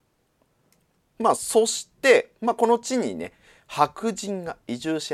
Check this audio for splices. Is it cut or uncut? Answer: uncut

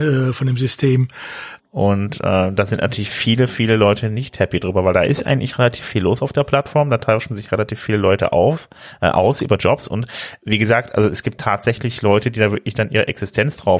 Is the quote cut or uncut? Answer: cut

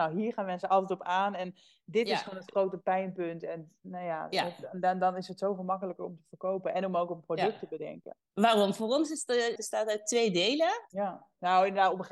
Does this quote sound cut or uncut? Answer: cut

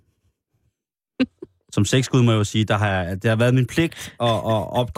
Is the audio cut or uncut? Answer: uncut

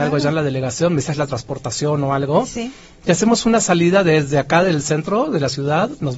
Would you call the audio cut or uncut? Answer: uncut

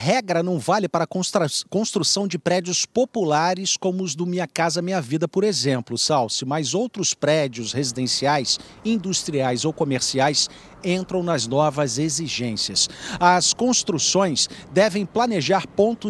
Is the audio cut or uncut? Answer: uncut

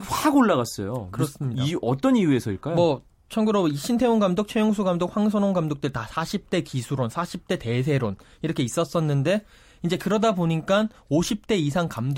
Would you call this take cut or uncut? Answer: uncut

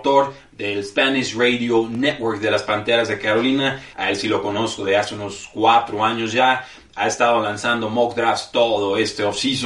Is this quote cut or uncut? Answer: cut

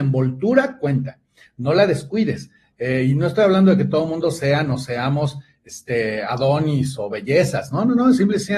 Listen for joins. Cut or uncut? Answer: uncut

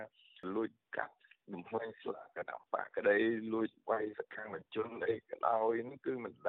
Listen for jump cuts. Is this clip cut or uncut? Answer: uncut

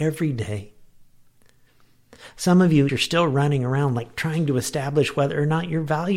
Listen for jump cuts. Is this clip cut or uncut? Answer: cut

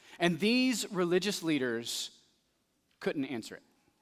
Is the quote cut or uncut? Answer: uncut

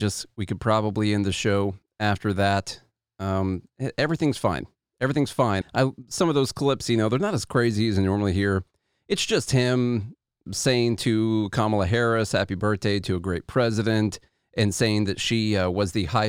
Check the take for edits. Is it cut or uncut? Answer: cut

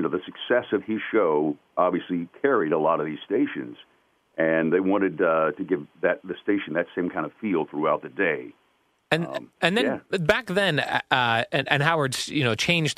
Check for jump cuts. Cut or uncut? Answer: uncut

